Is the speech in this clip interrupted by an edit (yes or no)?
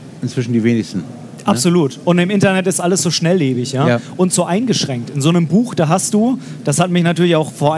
no